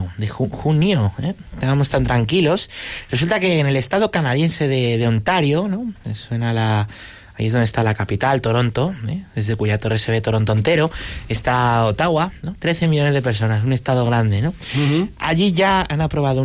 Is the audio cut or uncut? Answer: uncut